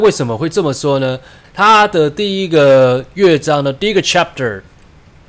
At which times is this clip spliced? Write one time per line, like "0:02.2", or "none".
0:01.4